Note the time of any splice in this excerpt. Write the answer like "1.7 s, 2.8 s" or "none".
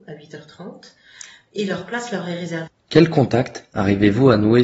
2.7 s